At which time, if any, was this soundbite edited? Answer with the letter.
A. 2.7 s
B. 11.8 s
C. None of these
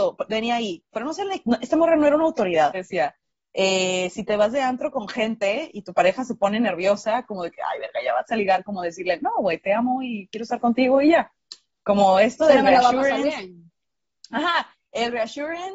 A